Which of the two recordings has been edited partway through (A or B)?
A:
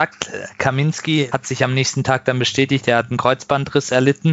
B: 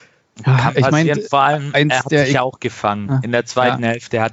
A